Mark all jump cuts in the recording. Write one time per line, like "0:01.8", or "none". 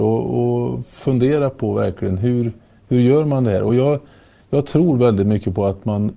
none